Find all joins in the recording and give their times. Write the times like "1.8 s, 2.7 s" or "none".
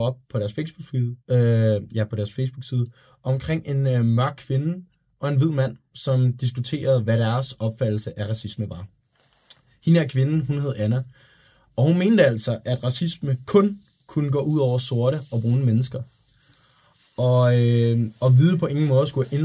1.2 s